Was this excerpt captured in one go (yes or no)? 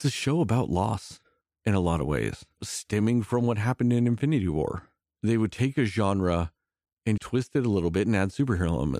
no